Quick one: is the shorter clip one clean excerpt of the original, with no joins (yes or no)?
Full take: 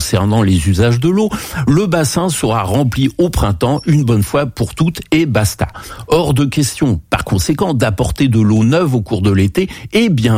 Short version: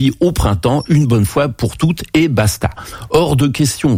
yes